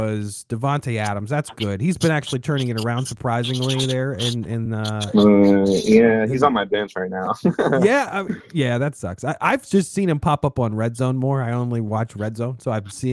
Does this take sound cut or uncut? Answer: uncut